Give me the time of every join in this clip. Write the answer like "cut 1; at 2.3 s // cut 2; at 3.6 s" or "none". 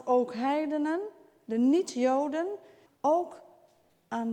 cut 1; at 2.9 s